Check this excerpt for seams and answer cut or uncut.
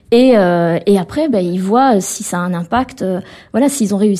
uncut